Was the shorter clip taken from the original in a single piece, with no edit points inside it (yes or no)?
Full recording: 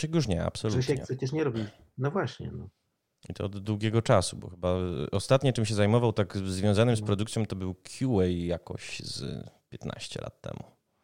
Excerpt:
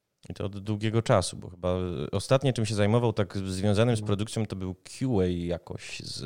yes